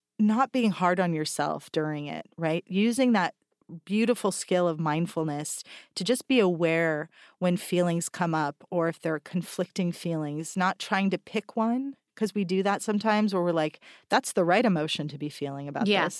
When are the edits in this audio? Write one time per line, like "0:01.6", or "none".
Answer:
none